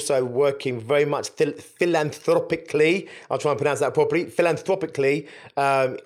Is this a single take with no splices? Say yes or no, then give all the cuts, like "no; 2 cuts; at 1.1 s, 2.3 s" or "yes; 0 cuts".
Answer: yes; 0 cuts